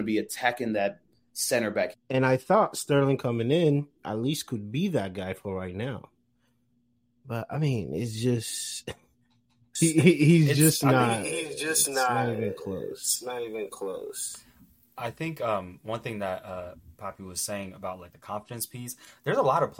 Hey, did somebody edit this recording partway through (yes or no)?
yes